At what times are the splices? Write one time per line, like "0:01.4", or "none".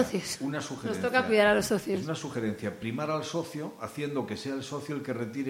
none